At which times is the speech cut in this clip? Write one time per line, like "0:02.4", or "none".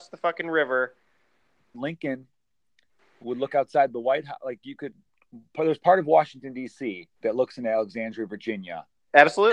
0:01.7
0:07.1